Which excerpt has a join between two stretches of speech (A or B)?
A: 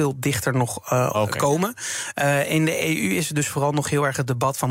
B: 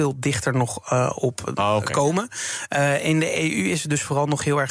A